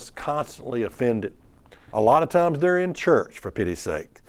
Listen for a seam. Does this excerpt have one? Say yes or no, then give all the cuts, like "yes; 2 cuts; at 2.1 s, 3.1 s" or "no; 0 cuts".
yes; 1 cut; at 1.9 s